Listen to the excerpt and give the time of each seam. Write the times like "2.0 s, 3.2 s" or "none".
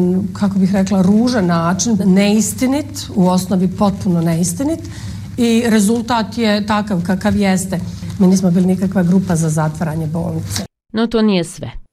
2.0 s, 8.2 s

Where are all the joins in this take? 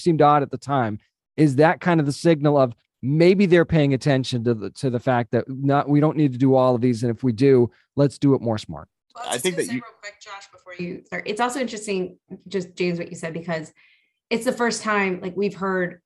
none

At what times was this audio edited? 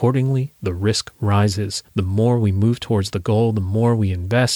none

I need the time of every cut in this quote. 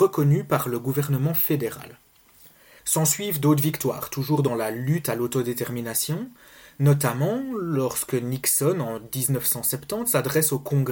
2.8 s

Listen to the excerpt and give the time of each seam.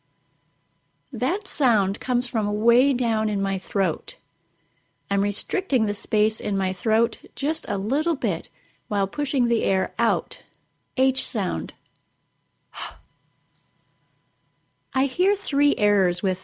10.8 s

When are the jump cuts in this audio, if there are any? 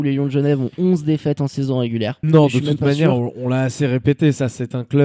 2.2 s

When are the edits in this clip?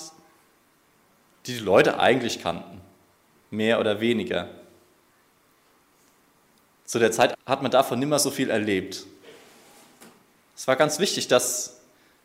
7.3 s, 10.4 s

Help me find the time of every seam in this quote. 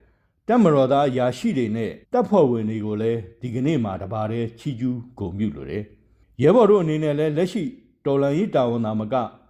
2.0 s

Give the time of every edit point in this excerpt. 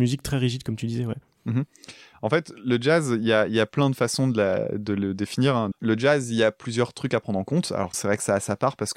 5.7 s, 7.9 s

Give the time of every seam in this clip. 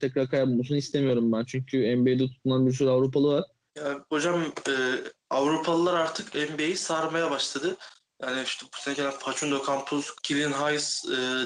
3.7 s, 10.1 s

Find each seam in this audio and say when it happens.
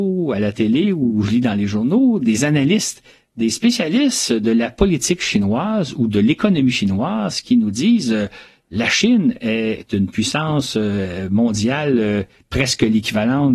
none

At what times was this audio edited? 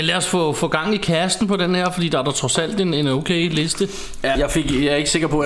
4.3 s

